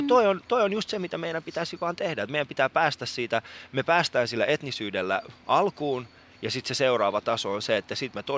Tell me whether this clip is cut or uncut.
uncut